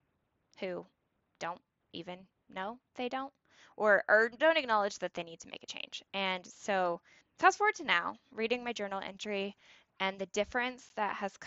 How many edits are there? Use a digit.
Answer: 1